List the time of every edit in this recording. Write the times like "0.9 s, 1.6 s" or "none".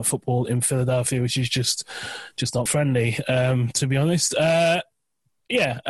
2.7 s